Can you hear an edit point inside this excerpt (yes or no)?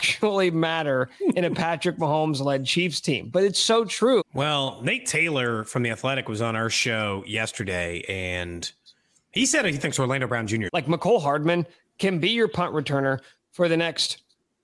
yes